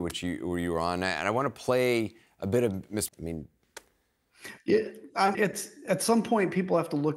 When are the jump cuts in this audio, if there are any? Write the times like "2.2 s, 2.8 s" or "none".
3.1 s, 5.3 s

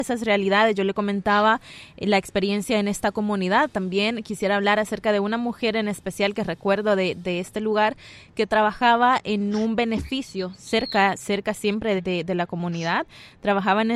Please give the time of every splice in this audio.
12.0 s

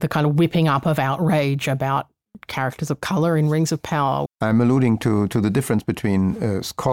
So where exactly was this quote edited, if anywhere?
4.3 s

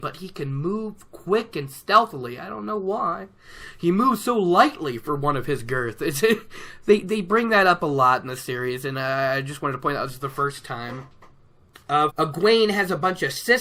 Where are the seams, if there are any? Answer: 12.1 s

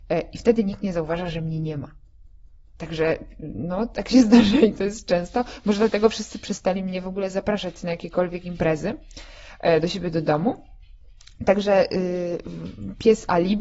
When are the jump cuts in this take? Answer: none

